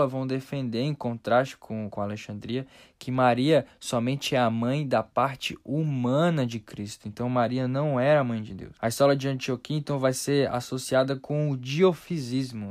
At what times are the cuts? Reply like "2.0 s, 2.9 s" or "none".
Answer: none